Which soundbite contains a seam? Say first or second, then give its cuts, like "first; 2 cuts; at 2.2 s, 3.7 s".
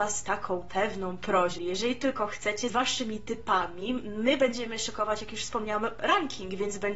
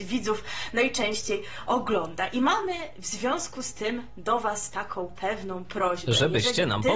first; 2 cuts; at 1.6 s, 2.7 s